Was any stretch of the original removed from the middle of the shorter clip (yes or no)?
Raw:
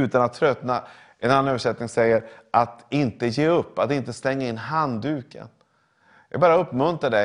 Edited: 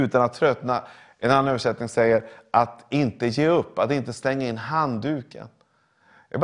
no